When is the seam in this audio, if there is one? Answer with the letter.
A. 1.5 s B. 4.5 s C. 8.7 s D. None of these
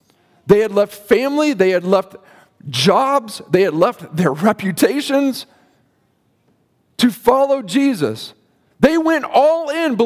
C